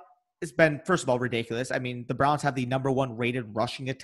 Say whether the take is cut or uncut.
uncut